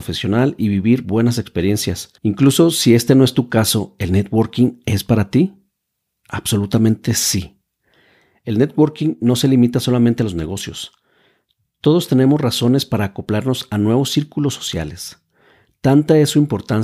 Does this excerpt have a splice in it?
yes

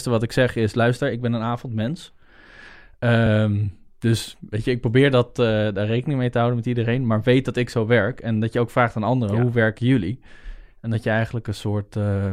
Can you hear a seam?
no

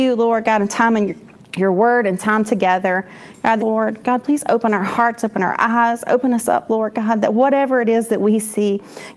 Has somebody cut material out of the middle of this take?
yes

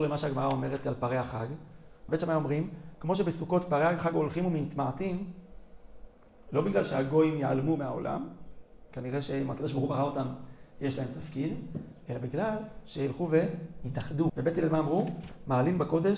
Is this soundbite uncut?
no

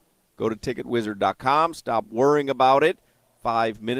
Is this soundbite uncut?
yes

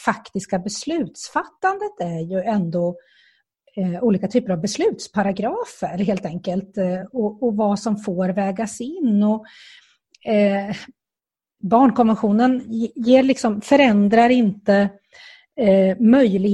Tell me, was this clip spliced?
no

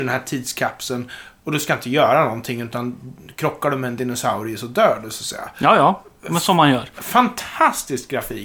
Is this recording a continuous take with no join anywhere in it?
yes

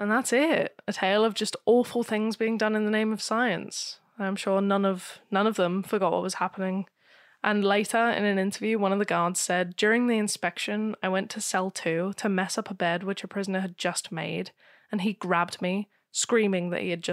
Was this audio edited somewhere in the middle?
no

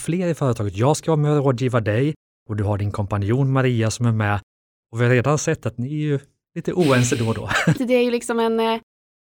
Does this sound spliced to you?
yes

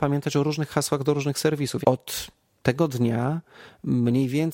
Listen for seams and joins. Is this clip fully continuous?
no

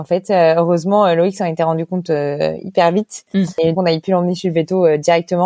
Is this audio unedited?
no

